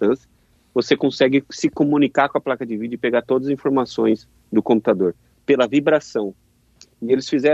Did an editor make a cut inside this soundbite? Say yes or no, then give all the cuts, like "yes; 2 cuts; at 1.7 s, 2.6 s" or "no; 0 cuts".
no; 0 cuts